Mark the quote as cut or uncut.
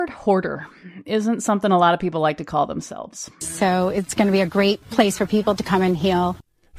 cut